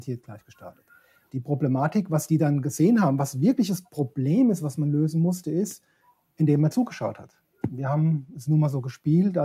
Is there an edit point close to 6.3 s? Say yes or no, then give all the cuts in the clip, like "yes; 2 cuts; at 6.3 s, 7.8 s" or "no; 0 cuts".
no; 2 cuts; at 1.3 s, 7.6 s